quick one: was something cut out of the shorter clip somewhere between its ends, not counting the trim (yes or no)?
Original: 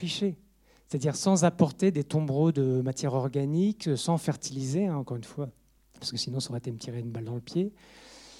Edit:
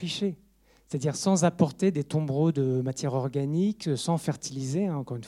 no